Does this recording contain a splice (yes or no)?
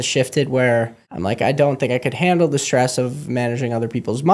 yes